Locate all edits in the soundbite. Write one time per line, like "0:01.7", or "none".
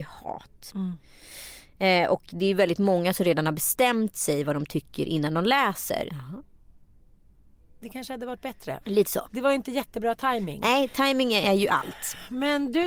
0:06.1
0:08.8